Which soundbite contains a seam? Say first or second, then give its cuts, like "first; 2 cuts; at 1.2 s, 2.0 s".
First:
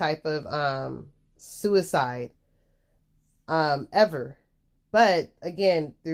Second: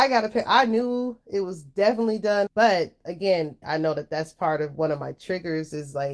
second; 2 cuts; at 2.5 s, 3.6 s